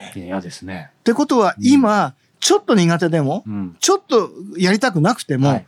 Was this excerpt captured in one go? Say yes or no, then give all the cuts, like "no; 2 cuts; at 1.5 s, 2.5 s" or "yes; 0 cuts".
yes; 0 cuts